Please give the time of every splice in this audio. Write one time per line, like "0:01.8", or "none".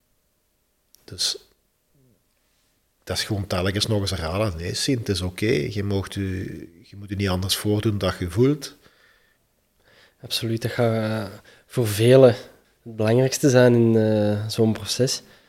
0:12.6